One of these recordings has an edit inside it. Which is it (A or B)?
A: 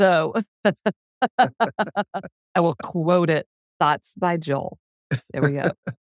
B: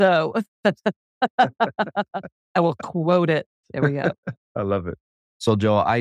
B